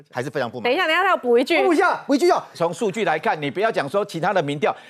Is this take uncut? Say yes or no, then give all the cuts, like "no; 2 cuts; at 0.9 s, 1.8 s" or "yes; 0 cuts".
no; 1 cut; at 2.5 s